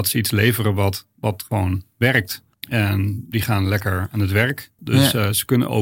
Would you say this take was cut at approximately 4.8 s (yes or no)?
yes